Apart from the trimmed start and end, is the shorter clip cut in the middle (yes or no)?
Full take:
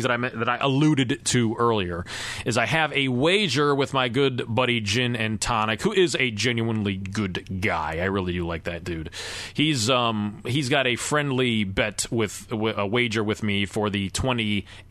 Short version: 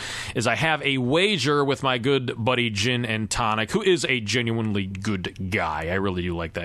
no